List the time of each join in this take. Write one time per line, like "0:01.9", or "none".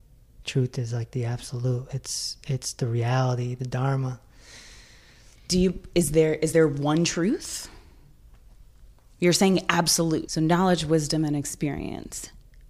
0:05.5
0:10.3

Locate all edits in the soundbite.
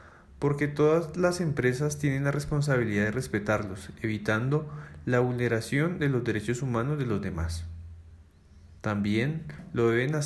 0:08.8

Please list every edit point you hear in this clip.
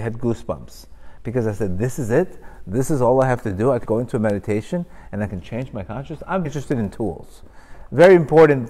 0:03.8
0:06.4

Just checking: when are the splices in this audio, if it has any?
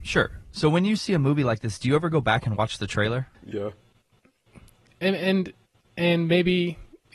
0:03.3

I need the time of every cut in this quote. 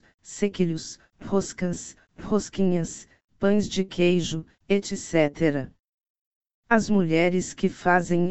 none

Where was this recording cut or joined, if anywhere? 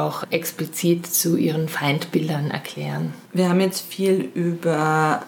0:03.3

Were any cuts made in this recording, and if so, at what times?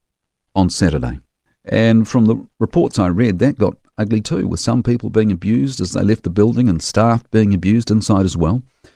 0:01.5

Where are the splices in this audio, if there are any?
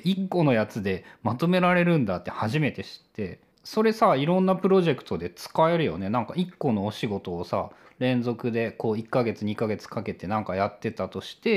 none

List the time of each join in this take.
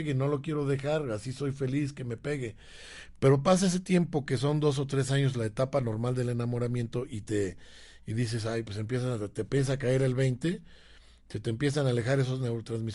none

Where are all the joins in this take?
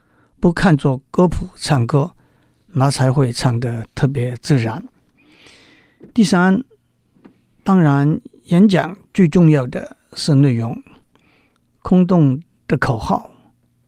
none

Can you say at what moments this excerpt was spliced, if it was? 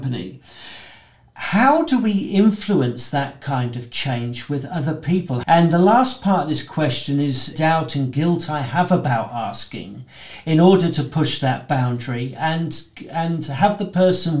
0:05.4
0:07.5

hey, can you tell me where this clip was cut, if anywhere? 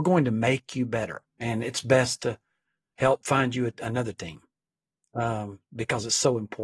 0:01.2

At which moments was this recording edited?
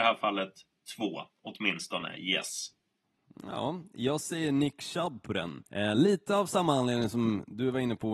0:05.7

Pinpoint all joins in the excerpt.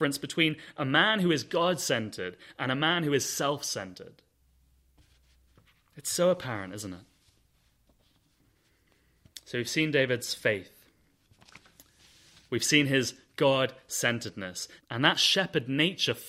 0:14.8

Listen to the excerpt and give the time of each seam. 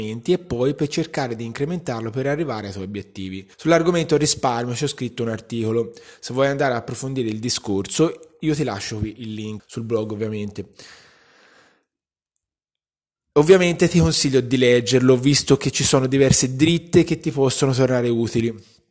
0:03.5
0:09.6

